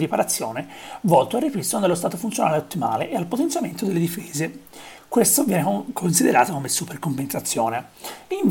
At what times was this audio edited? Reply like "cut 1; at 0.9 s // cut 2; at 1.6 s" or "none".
none

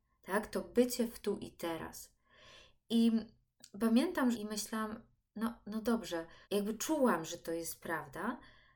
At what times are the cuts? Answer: cut 1; at 4.3 s // cut 2; at 6.4 s

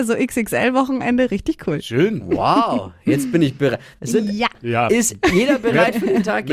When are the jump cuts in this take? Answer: cut 1; at 3.9 s

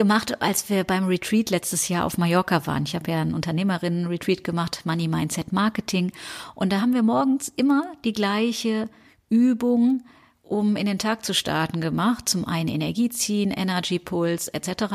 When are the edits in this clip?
none

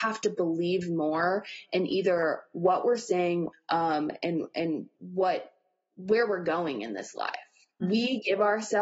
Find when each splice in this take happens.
cut 1; at 3.5 s // cut 2; at 5.0 s // cut 3; at 7.8 s

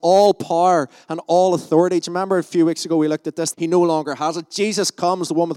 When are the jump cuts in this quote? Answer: cut 1; at 3.5 s

